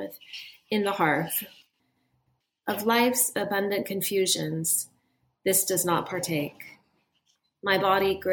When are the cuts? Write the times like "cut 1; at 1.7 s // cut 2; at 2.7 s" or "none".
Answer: none